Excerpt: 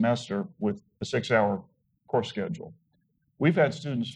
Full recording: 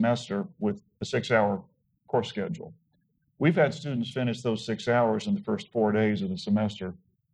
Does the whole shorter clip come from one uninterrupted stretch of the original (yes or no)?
yes